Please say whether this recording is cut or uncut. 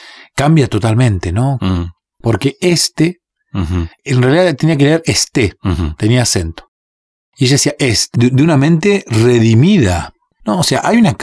cut